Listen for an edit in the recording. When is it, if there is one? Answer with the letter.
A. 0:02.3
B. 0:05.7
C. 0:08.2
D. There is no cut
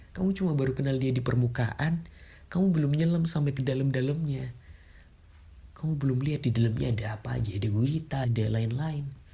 C